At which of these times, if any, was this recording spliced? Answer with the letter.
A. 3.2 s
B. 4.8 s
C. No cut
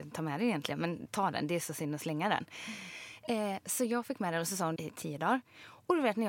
B